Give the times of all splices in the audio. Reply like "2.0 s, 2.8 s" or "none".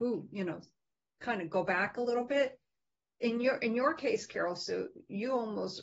none